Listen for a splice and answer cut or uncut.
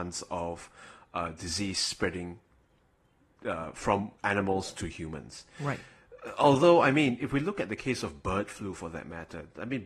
uncut